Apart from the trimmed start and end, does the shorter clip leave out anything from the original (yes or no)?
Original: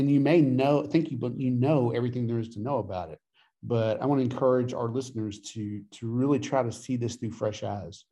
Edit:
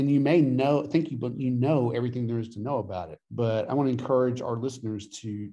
yes